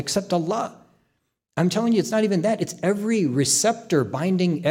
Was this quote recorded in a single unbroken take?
yes; 0 cuts

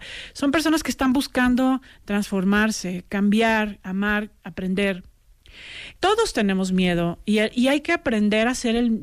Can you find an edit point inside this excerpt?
yes; 1 cut; at 6.0 s

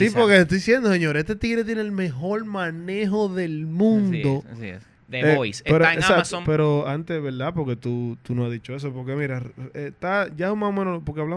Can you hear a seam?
yes; 1 cut; at 5.0 s

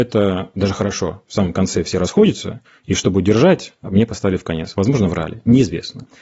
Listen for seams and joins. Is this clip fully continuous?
yes; 0 cuts

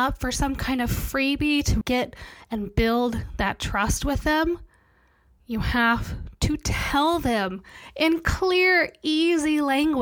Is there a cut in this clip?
yes; 1 cut; at 1.8 s

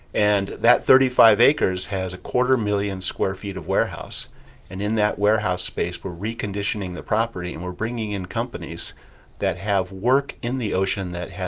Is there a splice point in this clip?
no; 0 cuts

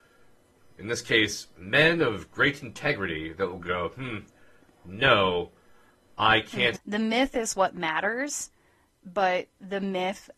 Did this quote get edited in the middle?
yes; 1 cut; at 6.8 s

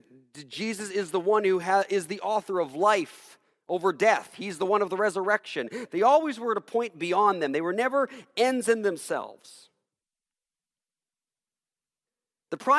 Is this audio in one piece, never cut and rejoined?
yes; 0 cuts

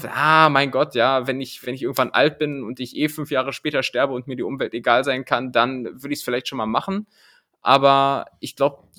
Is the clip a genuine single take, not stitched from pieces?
yes; 0 cuts

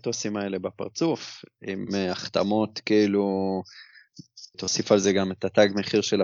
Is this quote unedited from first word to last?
no; 1 cut; at 4.5 s

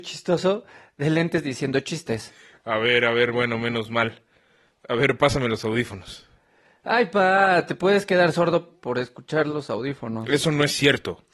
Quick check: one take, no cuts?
yes; 0 cuts

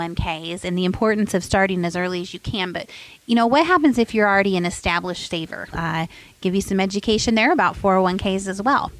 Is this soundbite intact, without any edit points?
no; 1 cut; at 5.7 s

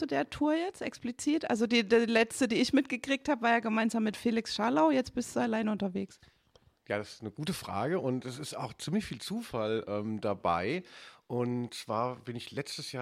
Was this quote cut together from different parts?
no; 0 cuts

